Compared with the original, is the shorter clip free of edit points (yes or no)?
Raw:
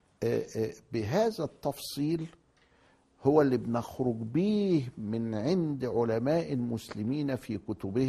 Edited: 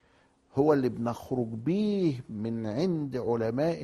yes